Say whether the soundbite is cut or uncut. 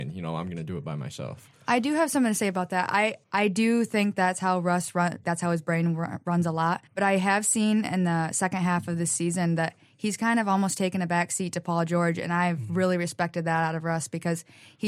cut